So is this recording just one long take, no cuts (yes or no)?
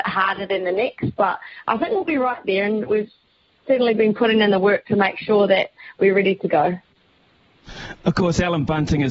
yes